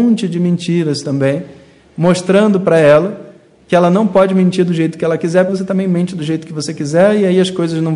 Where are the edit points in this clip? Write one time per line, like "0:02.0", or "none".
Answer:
0:05.5